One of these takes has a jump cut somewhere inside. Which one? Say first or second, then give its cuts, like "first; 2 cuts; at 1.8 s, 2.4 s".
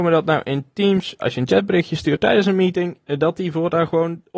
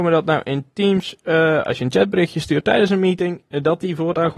first; 1 cut; at 1.2 s